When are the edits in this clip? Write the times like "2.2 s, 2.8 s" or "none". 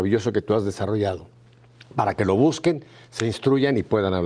none